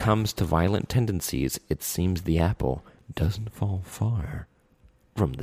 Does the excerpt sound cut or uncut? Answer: uncut